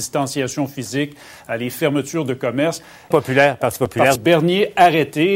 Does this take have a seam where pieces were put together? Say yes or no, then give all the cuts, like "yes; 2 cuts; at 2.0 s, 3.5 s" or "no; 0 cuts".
yes; 2 cuts; at 3.1 s, 4.2 s